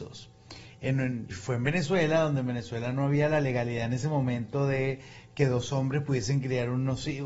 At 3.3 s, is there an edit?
no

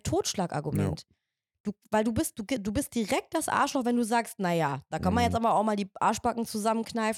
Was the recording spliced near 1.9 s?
no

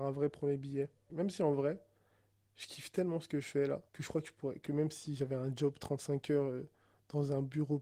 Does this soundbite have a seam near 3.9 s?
yes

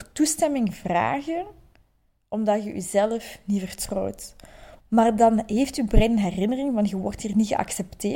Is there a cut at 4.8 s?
yes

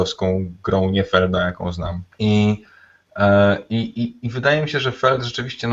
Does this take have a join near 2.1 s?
yes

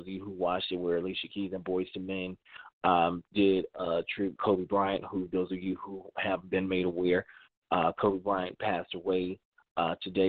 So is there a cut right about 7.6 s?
no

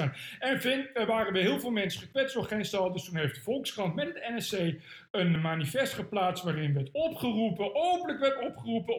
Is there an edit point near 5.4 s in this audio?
yes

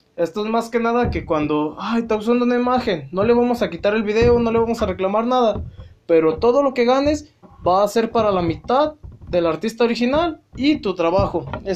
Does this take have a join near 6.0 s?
no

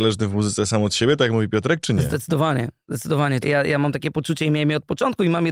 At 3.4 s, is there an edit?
yes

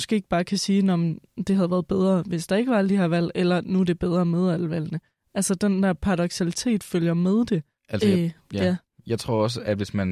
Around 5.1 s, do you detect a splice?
no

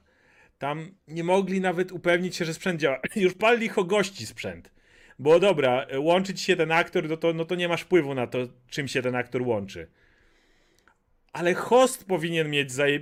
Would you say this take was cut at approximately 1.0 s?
yes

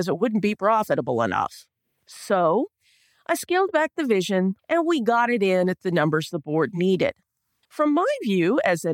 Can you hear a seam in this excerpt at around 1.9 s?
no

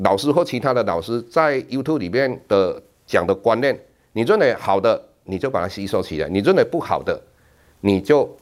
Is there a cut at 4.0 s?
no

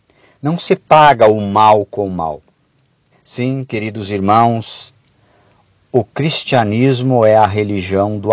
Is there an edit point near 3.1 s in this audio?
yes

